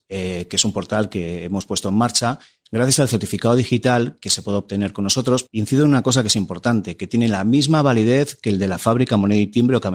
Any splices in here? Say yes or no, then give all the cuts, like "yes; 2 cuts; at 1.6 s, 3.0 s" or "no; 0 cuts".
no; 0 cuts